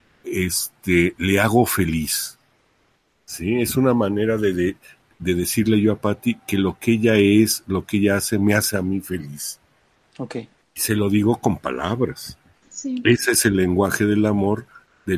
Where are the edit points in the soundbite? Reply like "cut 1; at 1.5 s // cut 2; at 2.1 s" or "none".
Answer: cut 1; at 12.6 s

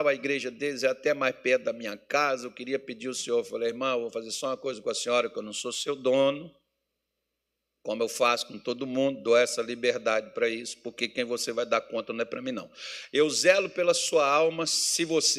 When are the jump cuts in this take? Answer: none

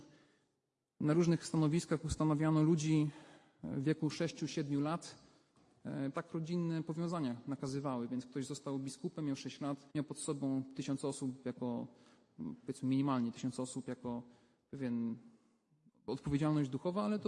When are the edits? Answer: cut 1; at 6.1 s // cut 2; at 9.9 s

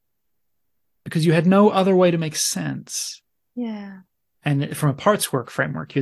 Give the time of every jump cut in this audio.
cut 1; at 4.3 s

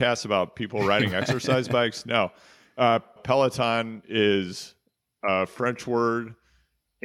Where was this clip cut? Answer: cut 1; at 3.2 s

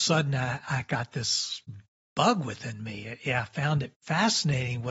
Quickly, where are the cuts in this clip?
none

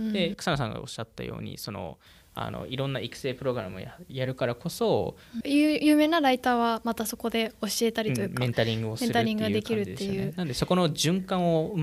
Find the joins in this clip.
cut 1; at 4.1 s // cut 2; at 5.4 s

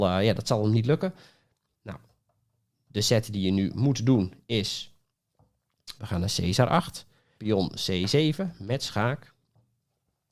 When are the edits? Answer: cut 1; at 1.7 s // cut 2; at 6.0 s // cut 3; at 7.4 s

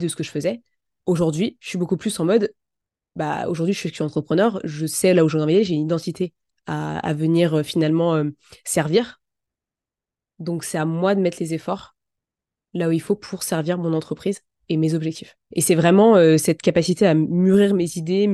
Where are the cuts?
cut 1; at 15.4 s

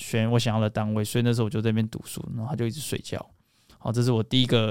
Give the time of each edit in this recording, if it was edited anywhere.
none

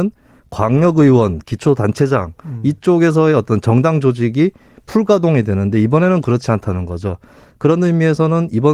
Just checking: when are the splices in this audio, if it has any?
cut 1; at 1.4 s

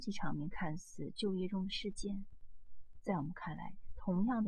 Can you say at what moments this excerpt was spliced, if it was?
none

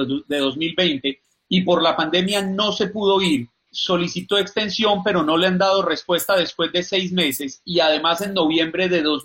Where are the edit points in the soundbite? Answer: cut 1; at 3.7 s

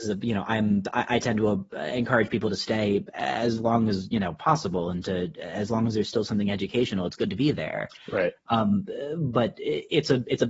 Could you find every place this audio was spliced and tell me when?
none

